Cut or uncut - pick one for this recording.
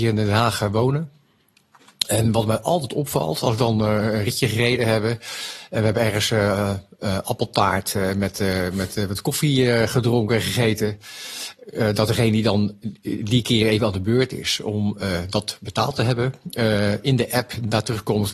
uncut